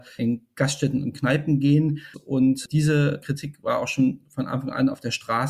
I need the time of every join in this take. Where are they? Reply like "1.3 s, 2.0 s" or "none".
2.1 s